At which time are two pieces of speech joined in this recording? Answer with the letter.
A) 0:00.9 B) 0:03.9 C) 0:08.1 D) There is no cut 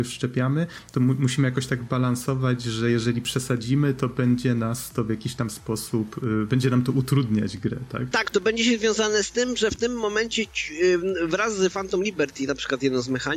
C